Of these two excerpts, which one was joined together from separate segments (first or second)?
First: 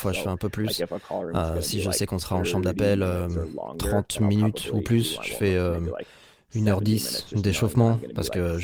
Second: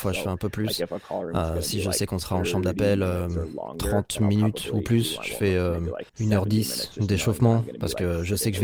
second